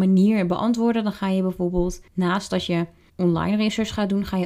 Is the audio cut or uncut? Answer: cut